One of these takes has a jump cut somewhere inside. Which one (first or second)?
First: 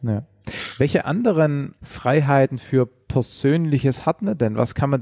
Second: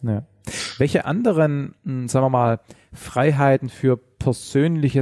first